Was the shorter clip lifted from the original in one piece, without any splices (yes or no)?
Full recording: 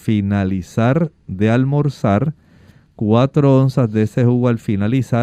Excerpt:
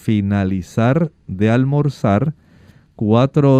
yes